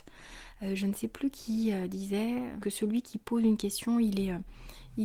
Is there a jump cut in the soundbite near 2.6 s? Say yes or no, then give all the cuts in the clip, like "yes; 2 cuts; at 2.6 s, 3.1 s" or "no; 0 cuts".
yes; 1 cut; at 2.6 s